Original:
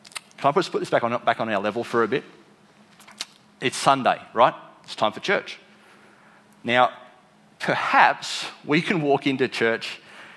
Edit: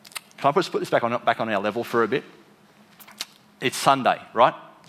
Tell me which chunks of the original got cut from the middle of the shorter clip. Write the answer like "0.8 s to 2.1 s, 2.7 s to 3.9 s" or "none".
none